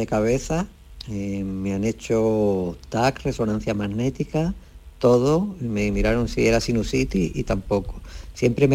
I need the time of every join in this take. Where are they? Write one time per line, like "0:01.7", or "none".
none